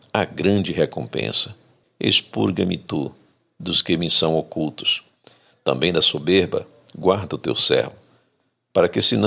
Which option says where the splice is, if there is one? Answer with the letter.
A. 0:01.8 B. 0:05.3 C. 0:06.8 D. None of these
A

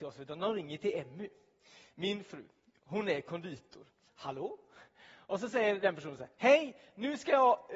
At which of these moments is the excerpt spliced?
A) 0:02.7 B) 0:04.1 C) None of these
B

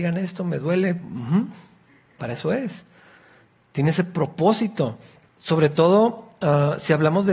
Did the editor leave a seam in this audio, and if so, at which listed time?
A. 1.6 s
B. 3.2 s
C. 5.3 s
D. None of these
C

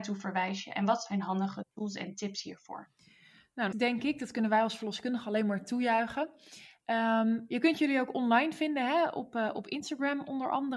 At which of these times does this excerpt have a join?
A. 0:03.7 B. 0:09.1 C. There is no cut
A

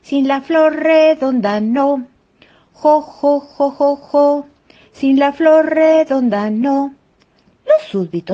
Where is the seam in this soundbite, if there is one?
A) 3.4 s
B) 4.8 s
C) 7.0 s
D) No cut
D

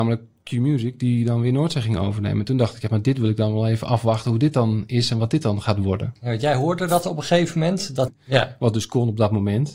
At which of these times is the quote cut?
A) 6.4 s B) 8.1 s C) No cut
B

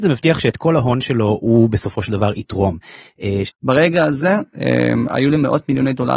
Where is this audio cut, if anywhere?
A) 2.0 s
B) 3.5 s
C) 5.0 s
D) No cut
B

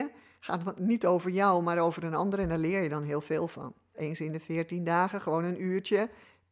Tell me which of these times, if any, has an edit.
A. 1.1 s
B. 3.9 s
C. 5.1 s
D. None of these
B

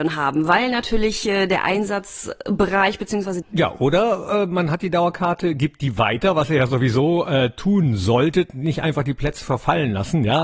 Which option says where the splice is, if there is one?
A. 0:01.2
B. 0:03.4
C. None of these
B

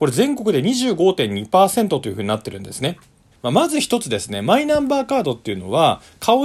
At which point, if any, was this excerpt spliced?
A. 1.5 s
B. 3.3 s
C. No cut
B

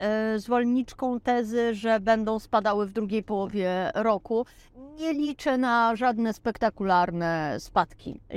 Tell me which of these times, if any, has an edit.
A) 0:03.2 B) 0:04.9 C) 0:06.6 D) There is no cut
D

